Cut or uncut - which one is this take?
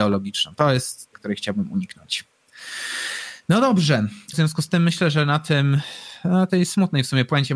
cut